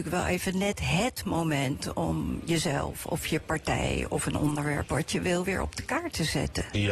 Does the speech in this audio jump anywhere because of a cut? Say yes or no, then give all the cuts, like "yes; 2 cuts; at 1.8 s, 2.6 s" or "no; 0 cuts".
no; 0 cuts